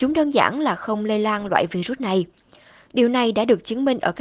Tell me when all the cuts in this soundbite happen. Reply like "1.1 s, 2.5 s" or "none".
none